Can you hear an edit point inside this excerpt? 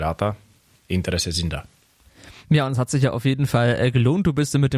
no; 0 cuts

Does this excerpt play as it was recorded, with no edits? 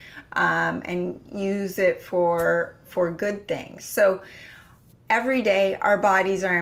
yes; 0 cuts

